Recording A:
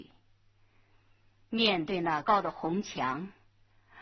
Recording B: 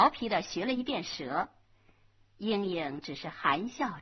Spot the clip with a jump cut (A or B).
A